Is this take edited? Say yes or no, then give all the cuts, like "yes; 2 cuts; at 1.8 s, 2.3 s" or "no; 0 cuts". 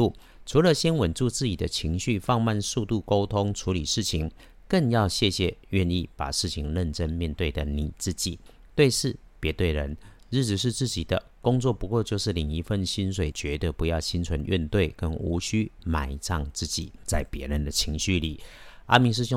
yes; 1 cut; at 13.3 s